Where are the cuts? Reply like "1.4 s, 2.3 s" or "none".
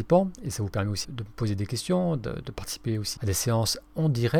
1.0 s, 3.2 s